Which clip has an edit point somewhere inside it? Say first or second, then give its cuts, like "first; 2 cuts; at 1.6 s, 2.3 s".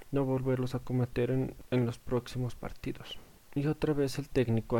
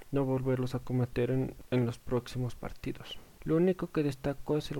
second; 1 cut; at 3.4 s